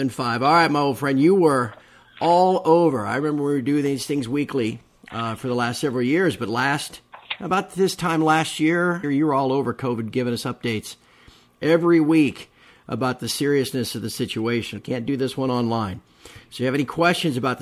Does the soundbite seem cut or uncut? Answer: cut